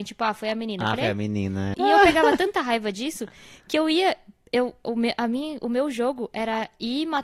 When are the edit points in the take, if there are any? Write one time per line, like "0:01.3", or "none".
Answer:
0:01.7